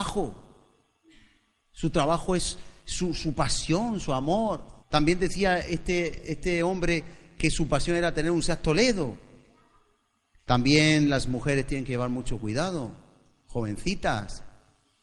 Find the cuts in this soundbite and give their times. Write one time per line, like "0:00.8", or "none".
0:04.8
0:10.4